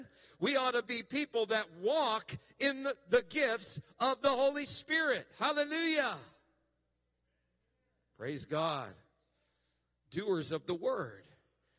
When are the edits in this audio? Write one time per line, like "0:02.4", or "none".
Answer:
none